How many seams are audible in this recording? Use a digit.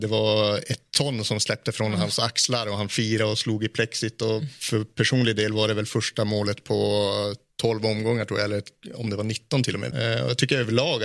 1